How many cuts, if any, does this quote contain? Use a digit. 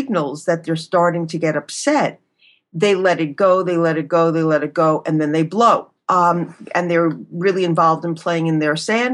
1